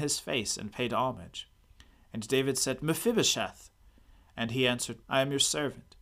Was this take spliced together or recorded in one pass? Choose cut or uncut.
cut